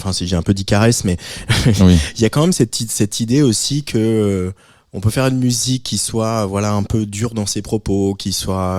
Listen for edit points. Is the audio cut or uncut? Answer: uncut